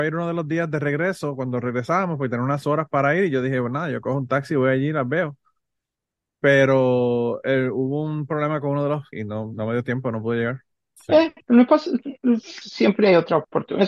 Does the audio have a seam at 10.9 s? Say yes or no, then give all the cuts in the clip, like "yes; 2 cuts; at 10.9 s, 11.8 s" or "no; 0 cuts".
yes; 3 cuts; at 9.1 s, 10.9 s, 12.6 s